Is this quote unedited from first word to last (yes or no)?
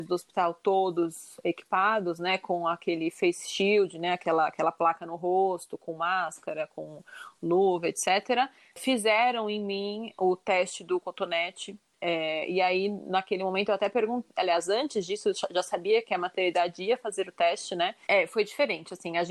no